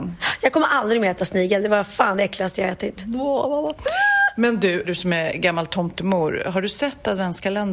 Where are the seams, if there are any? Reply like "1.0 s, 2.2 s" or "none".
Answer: 4.8 s